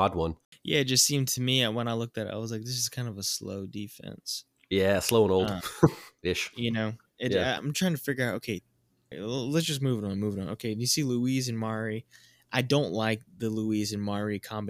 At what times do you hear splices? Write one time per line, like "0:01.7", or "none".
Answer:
0:07.6
0:09.1